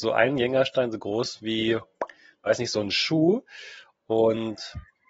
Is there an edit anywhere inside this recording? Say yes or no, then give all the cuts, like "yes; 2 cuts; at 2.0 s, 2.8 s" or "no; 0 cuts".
no; 0 cuts